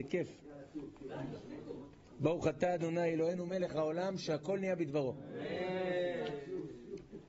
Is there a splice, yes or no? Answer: no